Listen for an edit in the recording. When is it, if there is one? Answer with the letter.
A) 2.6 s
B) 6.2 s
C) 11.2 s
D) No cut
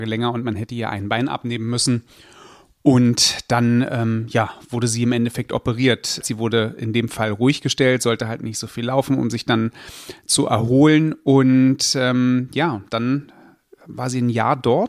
B